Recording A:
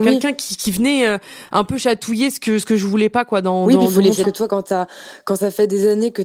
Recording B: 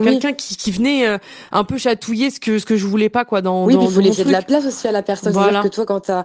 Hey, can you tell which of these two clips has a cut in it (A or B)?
A